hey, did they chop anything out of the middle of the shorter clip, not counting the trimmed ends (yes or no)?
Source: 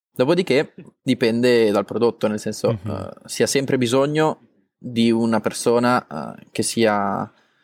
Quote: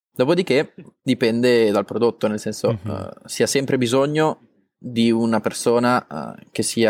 no